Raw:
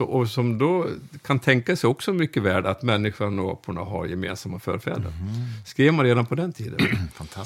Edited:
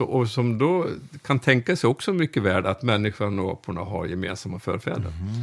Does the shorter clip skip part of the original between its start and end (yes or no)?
no